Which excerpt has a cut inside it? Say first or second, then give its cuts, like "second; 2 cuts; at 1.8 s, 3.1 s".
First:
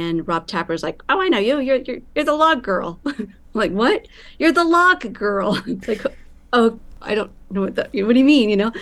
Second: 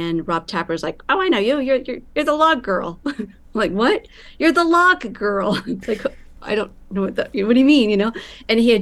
second; 1 cut; at 6.4 s